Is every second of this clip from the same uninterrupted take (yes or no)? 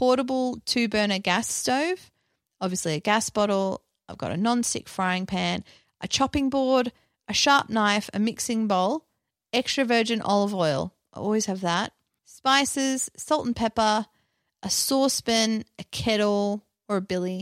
yes